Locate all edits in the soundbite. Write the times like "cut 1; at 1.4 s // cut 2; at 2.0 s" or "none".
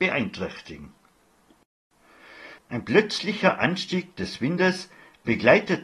cut 1; at 2.6 s

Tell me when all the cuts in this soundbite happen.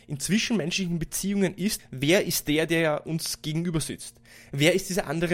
cut 1; at 1.8 s

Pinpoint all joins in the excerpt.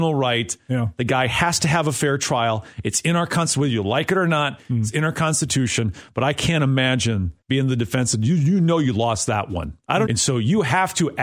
cut 1; at 7.4 s // cut 2; at 10.1 s

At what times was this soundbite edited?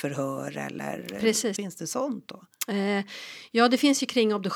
cut 1; at 1.6 s

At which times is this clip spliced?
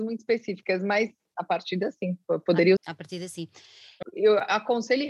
cut 1; at 2.8 s // cut 2; at 4.0 s

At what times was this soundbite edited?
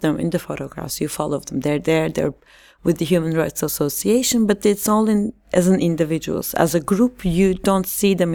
none

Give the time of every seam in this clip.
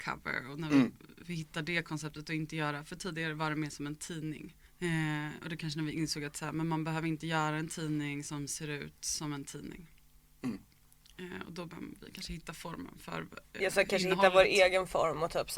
cut 1; at 4.6 s

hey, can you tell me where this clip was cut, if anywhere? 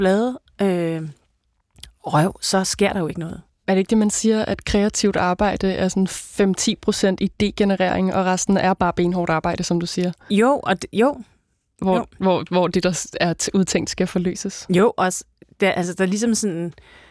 none

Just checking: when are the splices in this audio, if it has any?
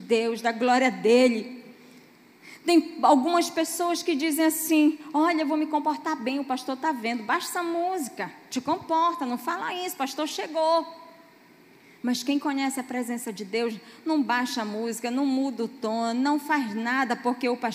none

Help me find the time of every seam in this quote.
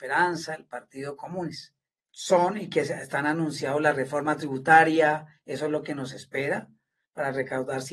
cut 1; at 2.0 s

